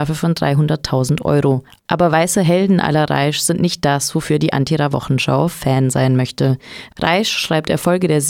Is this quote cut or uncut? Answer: cut